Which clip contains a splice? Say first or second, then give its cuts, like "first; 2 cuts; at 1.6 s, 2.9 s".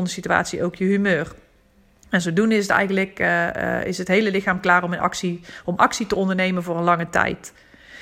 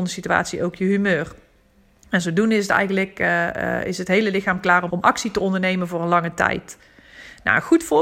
second; 1 cut; at 4.9 s